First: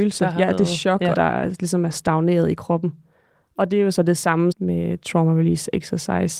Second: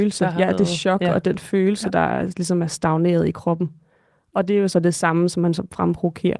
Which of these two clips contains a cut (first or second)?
first